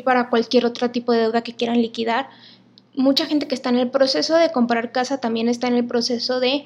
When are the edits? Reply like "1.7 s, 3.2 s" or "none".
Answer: none